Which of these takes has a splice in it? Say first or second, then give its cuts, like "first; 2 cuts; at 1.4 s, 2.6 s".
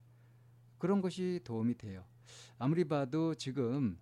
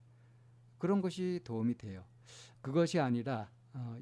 second; 1 cut; at 2.5 s